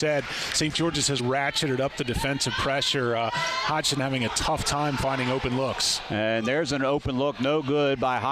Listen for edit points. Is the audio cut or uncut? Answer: cut